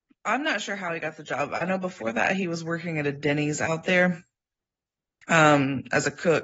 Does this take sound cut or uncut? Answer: uncut